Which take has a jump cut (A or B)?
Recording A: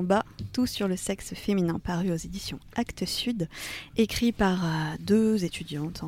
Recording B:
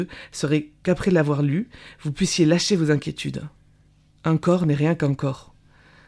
A